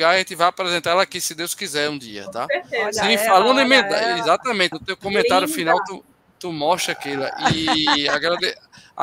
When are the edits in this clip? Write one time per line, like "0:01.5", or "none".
0:04.7